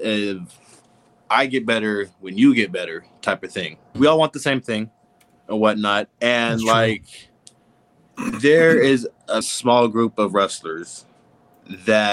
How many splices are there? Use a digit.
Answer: 2